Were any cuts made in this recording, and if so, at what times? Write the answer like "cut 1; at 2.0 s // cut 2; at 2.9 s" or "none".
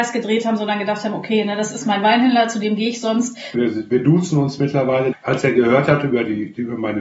cut 1; at 3.5 s // cut 2; at 5.1 s